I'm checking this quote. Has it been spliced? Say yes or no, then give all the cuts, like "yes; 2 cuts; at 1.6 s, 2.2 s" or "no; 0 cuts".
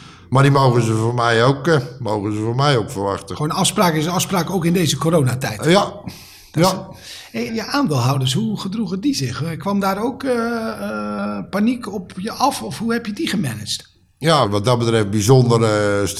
yes; 2 cuts; at 7.5 s, 14.4 s